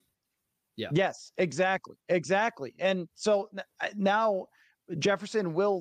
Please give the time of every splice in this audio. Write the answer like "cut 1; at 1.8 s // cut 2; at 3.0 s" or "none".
none